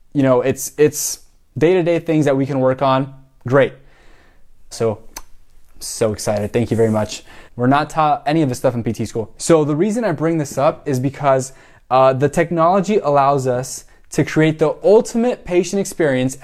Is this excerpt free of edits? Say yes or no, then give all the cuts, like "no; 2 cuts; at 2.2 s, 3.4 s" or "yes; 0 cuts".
no; 3 cuts; at 4.7 s, 7.5 s, 9.4 s